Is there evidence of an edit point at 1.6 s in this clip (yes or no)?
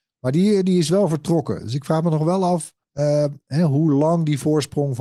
no